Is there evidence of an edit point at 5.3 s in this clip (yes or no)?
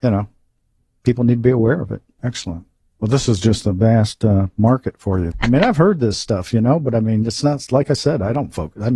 yes